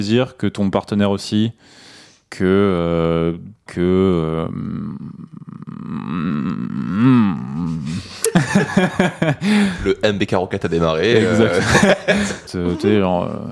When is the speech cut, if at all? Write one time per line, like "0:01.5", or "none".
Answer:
0:03.7
0:12.5

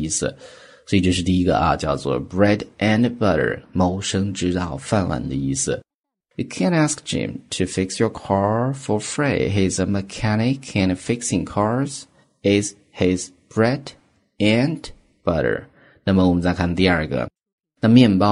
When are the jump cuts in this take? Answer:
none

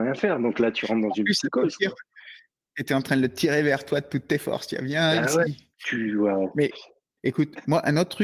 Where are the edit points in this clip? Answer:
0:05.7

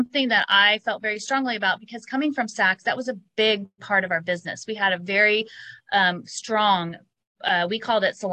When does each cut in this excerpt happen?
none

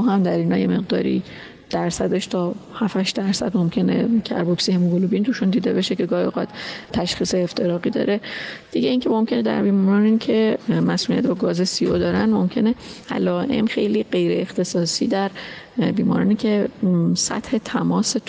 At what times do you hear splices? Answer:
0:13.7

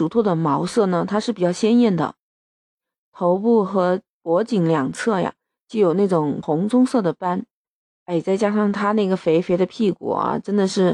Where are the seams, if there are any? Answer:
none

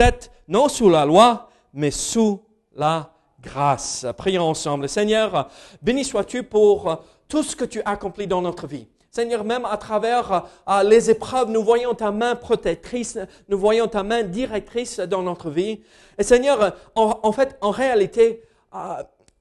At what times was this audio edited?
none

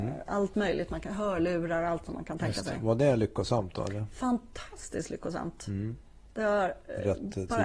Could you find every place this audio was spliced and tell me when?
none

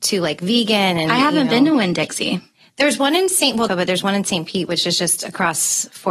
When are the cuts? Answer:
0:03.7

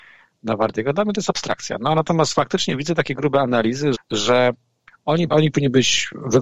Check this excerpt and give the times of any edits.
0:03.9
0:05.3

